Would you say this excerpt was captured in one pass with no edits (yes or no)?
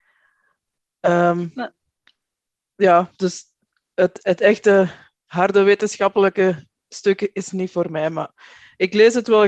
yes